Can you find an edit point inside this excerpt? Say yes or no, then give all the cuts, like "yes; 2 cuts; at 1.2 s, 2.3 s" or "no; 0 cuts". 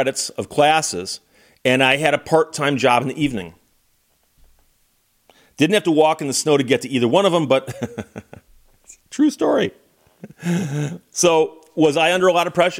no; 0 cuts